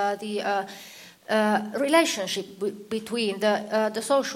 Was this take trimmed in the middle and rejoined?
no; 0 cuts

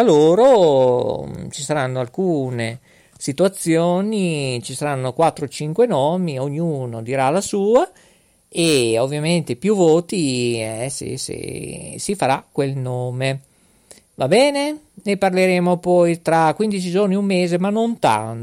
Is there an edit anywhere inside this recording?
no; 0 cuts

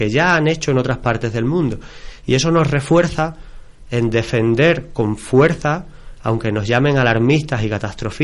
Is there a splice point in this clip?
no; 0 cuts

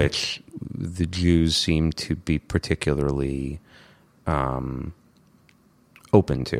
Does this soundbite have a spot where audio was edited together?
no; 0 cuts

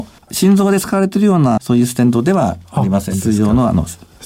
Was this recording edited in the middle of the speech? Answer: yes; 2 cuts; at 1.6 s, 3.1 s

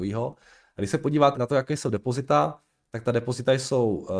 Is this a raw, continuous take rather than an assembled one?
no; 1 cut; at 1.3 s

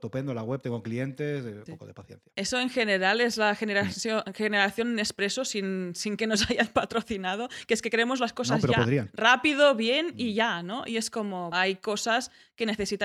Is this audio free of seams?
no; 2 cuts; at 1.7 s, 11.5 s

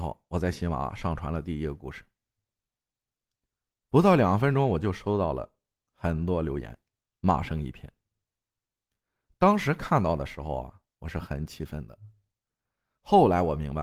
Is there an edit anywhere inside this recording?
no; 0 cuts

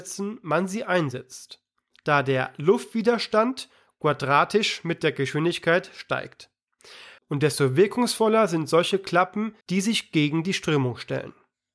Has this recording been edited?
yes; 2 cuts; at 7.2 s, 9.6 s

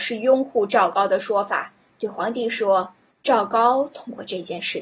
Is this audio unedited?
no; 1 cut; at 3.1 s

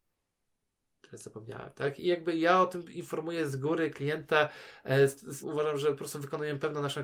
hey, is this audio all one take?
no; 2 cuts; at 2.0 s, 5.4 s

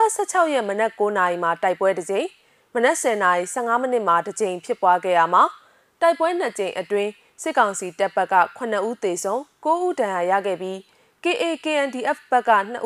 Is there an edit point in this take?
no; 0 cuts

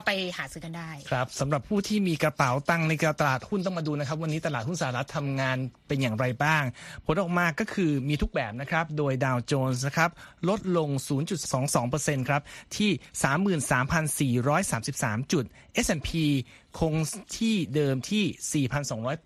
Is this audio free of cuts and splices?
yes; 0 cuts

